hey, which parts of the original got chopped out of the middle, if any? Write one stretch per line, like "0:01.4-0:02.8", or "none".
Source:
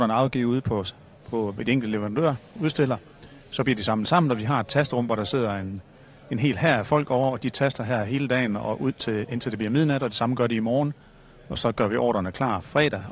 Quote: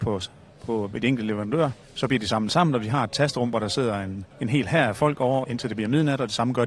0:02.5-0:03.4
0:05.9-0:06.2
0:07.3-0:09.3